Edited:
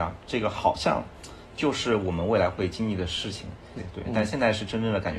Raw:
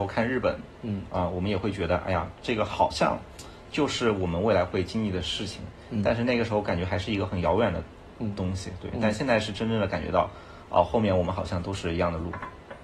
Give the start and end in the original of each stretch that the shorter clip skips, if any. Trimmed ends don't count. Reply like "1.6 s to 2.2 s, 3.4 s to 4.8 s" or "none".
5.9 s to 8.6 s